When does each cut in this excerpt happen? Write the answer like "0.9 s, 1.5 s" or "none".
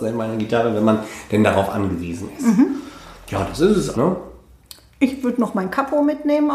3.9 s